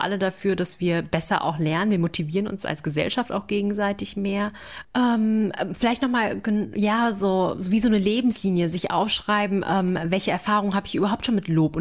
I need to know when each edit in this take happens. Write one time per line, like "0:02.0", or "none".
0:04.8